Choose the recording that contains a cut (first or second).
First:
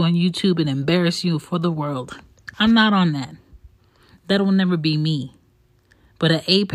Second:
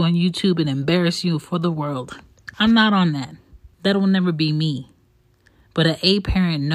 second